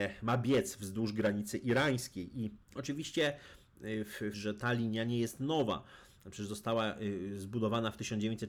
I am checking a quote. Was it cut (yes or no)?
yes